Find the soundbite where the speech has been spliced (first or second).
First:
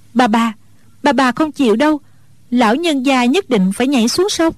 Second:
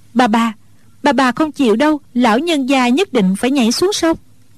second